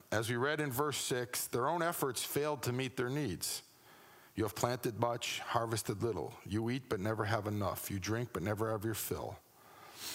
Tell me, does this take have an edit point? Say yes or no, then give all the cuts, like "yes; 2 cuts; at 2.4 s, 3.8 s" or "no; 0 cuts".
no; 0 cuts